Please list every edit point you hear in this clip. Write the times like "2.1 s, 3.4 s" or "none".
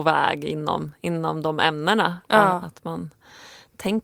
none